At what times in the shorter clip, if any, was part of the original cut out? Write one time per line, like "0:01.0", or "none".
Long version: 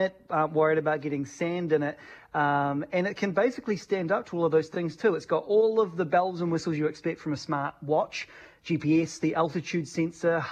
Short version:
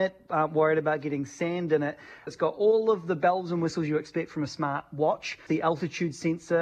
0:02.3
0:05.5